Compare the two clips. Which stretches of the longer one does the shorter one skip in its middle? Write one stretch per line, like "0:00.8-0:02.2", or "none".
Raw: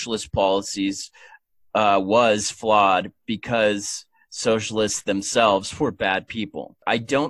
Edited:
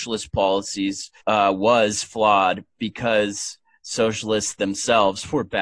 0:01.2-0:01.7

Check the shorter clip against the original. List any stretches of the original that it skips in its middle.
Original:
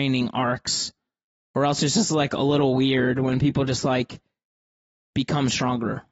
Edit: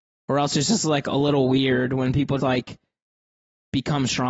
0:03.7-0:03.8

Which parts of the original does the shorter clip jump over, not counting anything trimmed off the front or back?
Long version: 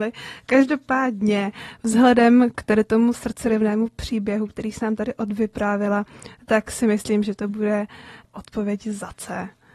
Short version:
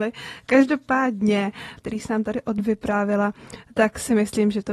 0:01.8-0:04.5

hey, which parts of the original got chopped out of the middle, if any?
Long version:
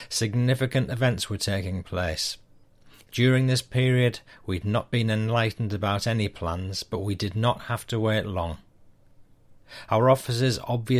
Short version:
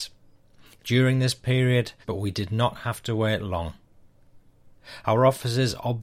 0:04.3-0:06.8

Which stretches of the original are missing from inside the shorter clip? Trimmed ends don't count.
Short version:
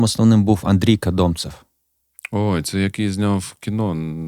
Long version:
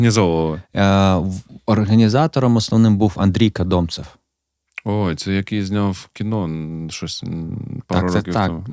none

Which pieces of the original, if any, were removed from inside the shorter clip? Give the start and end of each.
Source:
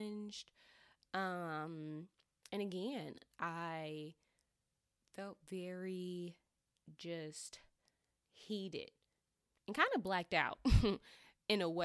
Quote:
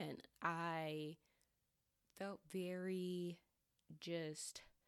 none

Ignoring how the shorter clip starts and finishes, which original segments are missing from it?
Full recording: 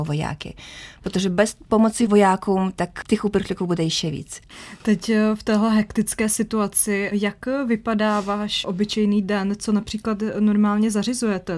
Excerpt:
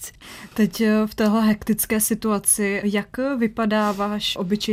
none

